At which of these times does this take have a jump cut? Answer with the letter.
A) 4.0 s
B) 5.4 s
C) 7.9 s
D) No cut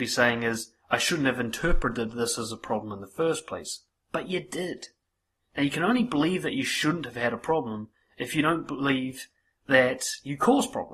B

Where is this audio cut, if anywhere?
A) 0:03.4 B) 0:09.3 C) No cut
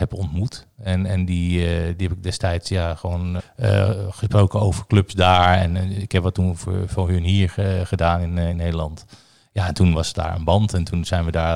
A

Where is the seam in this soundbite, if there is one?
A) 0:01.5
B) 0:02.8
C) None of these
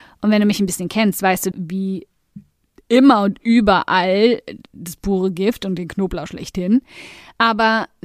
A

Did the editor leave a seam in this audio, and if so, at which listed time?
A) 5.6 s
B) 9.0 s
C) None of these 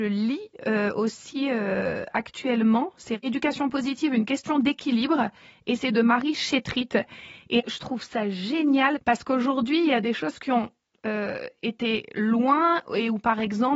B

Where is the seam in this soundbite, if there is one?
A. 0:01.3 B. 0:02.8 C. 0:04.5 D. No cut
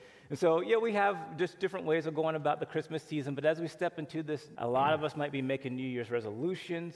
C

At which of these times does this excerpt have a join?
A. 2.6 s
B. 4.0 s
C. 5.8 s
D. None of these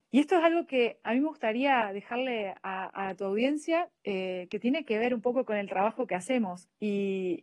B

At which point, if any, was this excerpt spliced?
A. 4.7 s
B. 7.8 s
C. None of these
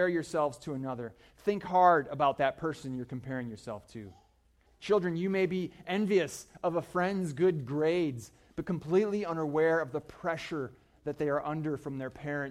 A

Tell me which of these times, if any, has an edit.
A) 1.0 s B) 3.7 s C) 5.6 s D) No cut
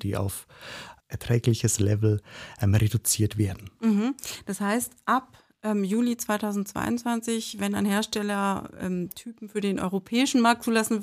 A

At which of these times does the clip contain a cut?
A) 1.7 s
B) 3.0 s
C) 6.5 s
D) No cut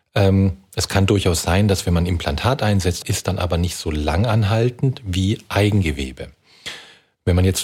B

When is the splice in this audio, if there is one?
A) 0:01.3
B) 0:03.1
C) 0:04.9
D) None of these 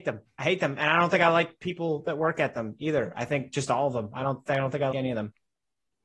C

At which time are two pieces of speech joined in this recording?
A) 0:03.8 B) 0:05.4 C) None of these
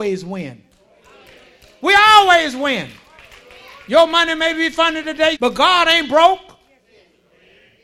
B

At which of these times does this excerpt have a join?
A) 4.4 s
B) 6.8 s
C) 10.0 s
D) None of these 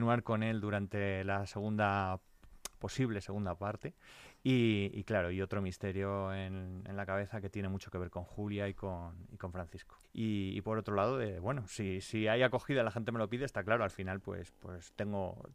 C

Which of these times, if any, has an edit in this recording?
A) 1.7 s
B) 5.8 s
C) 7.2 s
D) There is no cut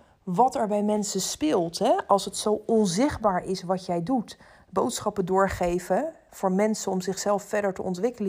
D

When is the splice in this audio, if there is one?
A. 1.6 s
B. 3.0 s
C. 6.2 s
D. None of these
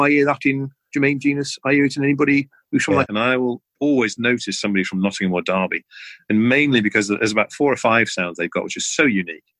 B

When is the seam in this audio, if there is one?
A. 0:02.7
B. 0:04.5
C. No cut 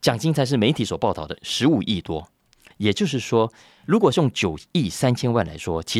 A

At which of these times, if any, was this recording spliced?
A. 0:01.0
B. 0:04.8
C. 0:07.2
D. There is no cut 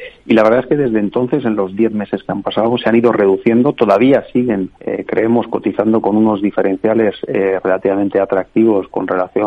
B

